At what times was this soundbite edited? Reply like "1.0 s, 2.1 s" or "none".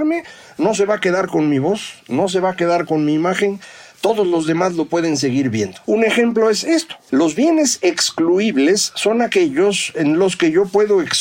5.8 s, 7.1 s